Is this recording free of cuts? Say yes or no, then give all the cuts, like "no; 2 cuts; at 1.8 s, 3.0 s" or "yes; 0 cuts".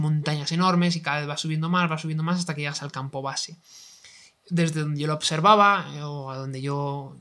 no; 1 cut; at 4.3 s